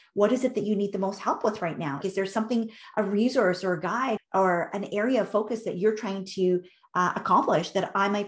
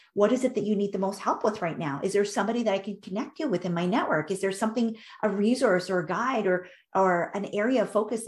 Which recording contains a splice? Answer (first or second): first